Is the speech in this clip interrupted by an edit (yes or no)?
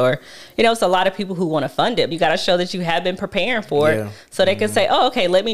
yes